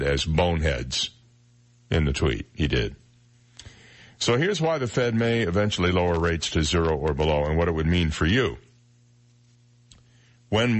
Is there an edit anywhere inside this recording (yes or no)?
no